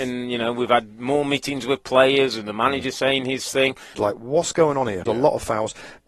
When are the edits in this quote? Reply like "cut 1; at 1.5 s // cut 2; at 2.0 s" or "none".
cut 1; at 3.9 s // cut 2; at 5.1 s